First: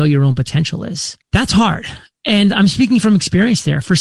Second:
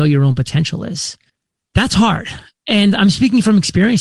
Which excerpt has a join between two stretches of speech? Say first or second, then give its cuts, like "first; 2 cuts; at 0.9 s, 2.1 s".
first; 1 cut; at 1.2 s